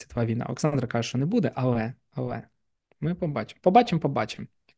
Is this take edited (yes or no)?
no